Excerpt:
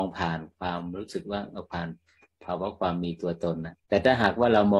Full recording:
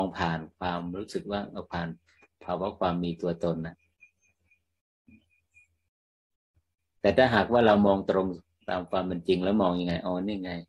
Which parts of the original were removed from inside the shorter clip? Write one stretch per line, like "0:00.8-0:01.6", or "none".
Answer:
0:03.8-0:06.9